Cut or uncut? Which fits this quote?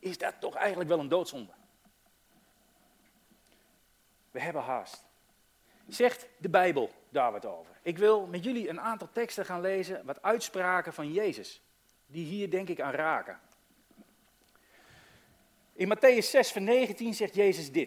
uncut